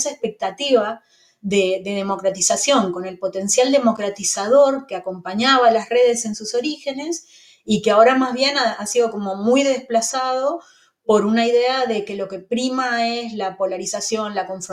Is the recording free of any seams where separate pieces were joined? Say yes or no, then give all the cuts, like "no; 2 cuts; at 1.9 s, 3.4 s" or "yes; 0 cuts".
yes; 0 cuts